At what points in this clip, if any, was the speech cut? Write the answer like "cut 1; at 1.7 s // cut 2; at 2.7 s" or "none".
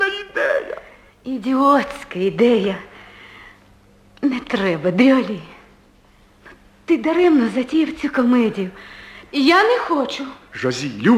cut 1; at 9.3 s